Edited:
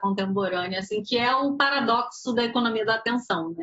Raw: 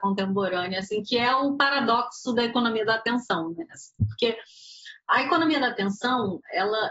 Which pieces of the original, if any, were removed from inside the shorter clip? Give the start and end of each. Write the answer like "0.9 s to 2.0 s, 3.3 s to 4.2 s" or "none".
none